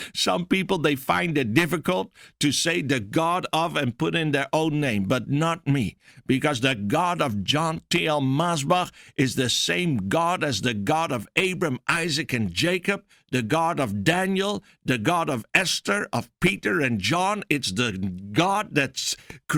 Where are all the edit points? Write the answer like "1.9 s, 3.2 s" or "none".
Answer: none